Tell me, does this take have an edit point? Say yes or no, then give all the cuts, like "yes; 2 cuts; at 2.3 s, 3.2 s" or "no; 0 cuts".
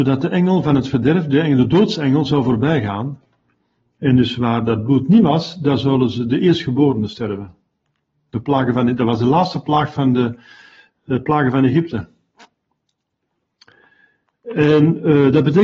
no; 0 cuts